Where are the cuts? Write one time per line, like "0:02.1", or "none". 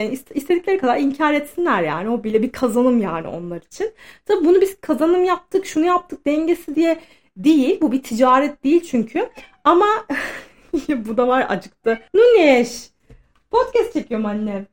0:12.1